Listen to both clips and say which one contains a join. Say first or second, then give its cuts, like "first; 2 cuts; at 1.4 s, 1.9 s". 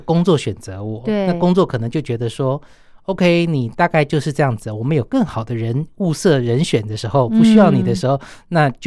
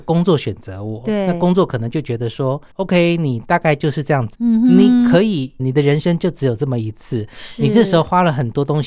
second; 3 cuts; at 2.7 s, 4.3 s, 5.6 s